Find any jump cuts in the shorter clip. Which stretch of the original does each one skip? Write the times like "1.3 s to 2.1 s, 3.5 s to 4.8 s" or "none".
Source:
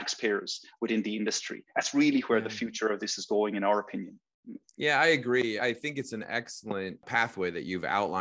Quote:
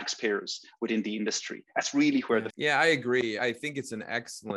2.5 s to 4.7 s